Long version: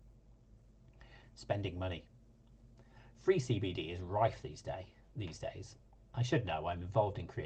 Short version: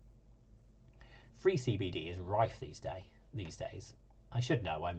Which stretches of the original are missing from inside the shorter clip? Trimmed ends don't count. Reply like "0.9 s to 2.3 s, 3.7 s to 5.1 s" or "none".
1.3 s to 3.1 s